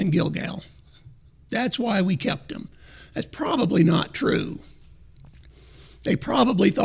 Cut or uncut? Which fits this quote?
uncut